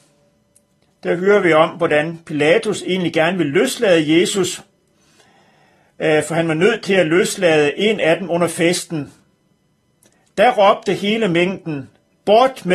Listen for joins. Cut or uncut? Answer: uncut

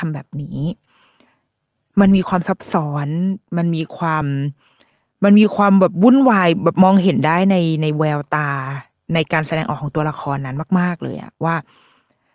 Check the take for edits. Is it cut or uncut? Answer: uncut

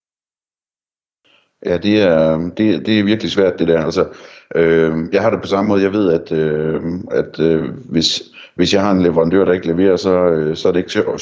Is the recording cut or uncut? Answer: uncut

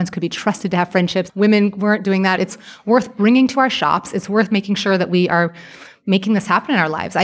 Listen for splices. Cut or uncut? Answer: cut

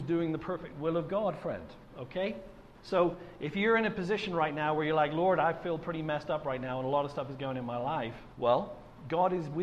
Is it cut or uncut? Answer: uncut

